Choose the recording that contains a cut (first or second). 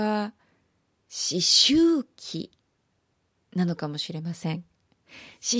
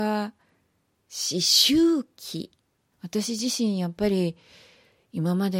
second